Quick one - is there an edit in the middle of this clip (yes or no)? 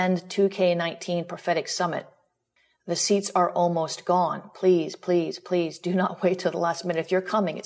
no